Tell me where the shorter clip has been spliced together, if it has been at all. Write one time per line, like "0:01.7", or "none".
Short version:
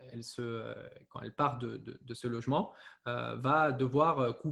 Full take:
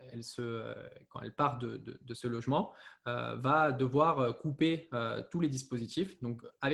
none